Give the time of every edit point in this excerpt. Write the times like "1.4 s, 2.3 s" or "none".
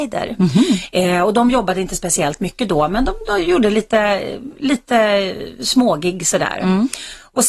none